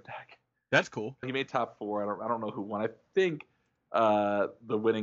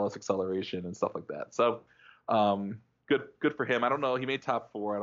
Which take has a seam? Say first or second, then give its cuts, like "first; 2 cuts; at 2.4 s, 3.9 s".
first; 1 cut; at 1.2 s